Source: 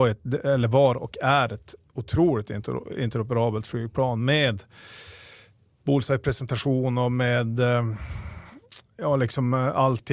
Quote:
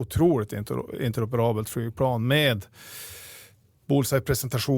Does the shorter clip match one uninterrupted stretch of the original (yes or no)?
yes